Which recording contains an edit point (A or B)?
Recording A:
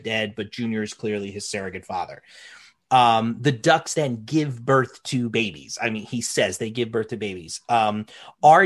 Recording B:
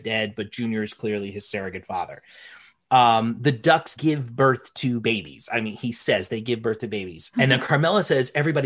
B